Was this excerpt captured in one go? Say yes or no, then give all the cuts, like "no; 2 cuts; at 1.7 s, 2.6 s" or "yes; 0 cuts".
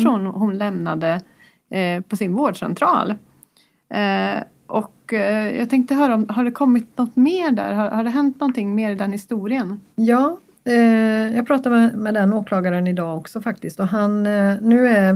yes; 0 cuts